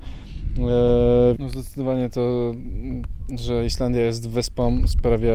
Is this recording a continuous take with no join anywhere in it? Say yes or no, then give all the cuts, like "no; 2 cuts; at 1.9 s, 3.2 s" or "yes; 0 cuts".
no; 1 cut; at 1.4 s